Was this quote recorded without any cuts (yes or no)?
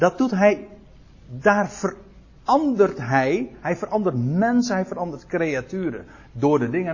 yes